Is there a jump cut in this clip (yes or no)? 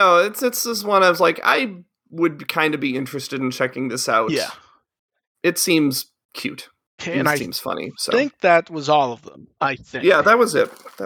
no